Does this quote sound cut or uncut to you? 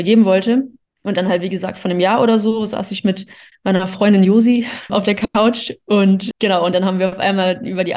cut